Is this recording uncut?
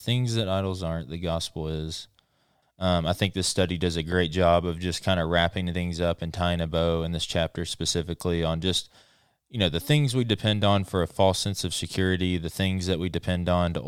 no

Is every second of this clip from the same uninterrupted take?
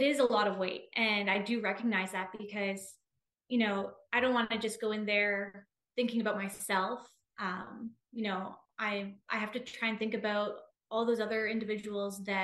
yes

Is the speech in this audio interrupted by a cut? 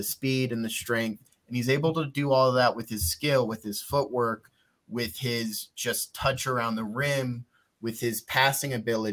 no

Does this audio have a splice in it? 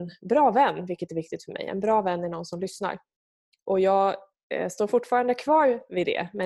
no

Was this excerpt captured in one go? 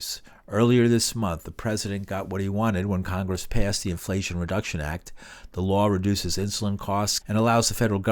no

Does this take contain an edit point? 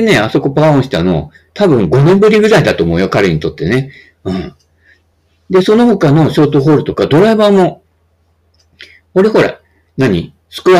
no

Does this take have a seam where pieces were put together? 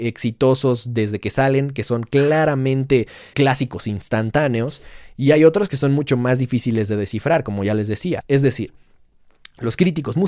yes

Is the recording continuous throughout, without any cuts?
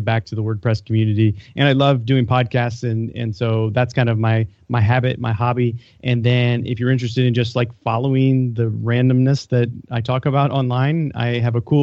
yes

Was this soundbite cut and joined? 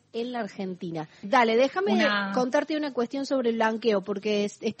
yes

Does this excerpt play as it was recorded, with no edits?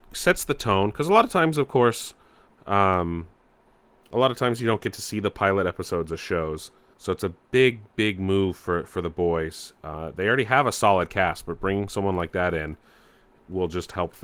no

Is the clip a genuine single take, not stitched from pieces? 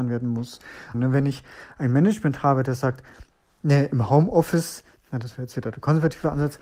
no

